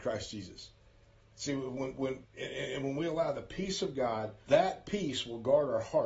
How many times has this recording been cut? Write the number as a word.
two